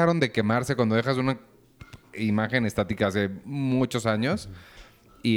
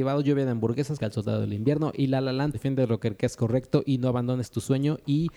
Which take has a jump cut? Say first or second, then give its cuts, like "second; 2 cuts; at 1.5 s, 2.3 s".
second; 2 cuts; at 1.0 s, 2.5 s